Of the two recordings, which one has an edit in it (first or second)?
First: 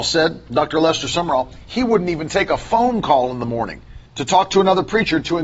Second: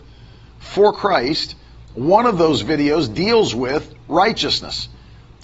first